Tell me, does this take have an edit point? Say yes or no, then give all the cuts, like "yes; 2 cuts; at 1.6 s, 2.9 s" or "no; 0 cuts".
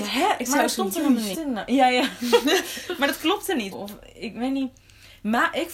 yes; 2 cuts; at 1.3 s, 3.7 s